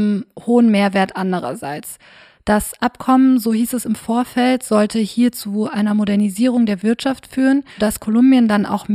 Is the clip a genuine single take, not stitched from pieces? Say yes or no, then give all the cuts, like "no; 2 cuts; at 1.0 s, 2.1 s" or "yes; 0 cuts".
no; 1 cut; at 7.8 s